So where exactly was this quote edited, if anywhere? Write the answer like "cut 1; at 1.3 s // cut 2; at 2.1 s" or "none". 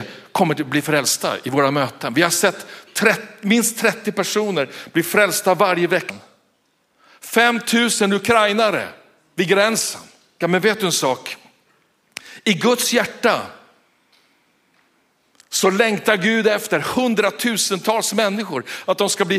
cut 1; at 6.1 s // cut 2; at 10.4 s